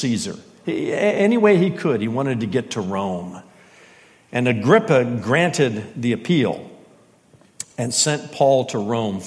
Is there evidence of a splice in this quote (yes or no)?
no